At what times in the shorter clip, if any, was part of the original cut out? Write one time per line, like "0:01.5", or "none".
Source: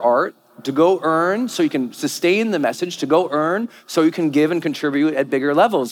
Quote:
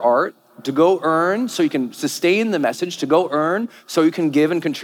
none